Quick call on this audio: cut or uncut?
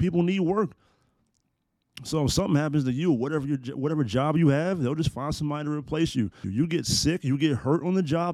cut